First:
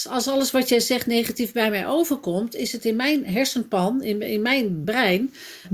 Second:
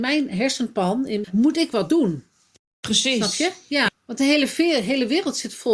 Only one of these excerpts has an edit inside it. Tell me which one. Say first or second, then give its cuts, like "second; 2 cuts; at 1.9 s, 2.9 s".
second; 2 cuts; at 1.2 s, 3.9 s